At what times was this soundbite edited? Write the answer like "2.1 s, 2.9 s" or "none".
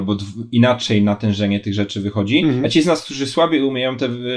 none